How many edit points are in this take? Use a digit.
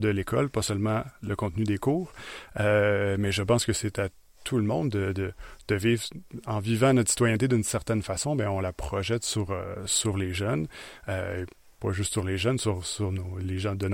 0